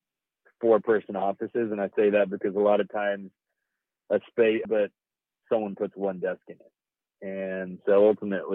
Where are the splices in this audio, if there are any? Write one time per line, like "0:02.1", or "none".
0:04.6